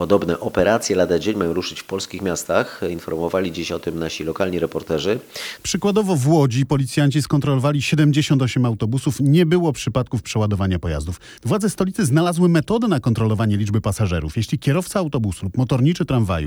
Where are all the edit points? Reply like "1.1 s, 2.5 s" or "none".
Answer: 5.6 s, 11.4 s